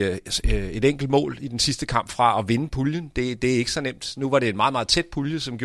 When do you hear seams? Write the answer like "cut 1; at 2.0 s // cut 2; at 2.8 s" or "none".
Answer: none